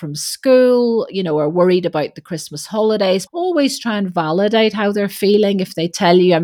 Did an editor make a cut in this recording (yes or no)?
yes